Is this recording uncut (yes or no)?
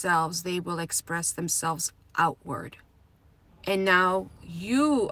no